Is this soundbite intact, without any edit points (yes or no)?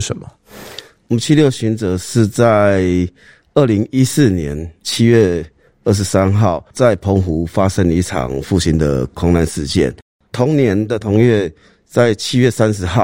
yes